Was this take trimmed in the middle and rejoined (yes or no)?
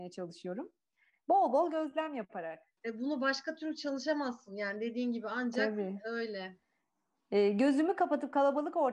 yes